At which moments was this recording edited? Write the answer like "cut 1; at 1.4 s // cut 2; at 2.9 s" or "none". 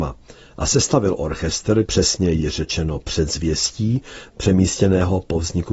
cut 1; at 1.9 s // cut 2; at 4.3 s